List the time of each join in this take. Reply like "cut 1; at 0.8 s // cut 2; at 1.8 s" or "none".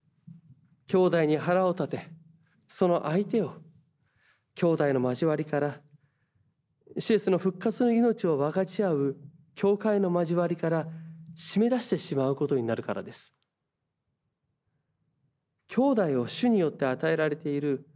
cut 1; at 2.5 s